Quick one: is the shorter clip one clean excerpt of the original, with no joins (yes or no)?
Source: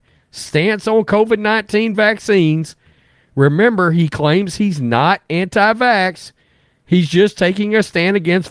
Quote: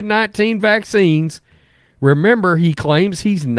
yes